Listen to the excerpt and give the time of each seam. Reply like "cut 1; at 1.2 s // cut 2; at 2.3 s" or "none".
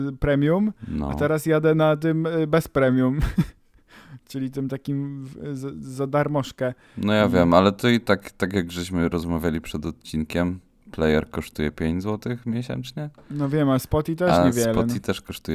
none